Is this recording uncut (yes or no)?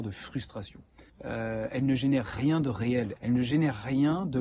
no